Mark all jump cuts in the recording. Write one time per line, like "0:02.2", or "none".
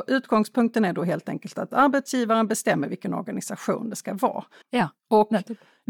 0:04.6